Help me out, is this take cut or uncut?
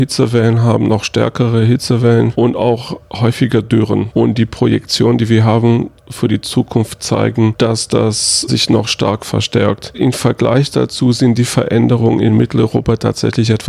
uncut